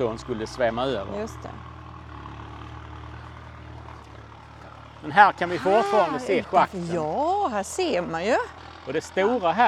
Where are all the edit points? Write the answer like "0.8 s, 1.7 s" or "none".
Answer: none